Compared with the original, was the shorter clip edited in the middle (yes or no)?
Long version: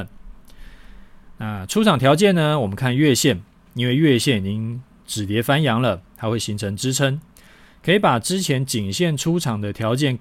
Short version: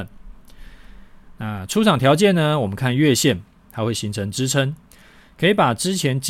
yes